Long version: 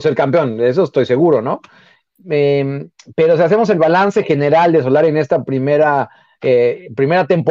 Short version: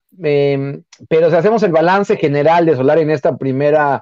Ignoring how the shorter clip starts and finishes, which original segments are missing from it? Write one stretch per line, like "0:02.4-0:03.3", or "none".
none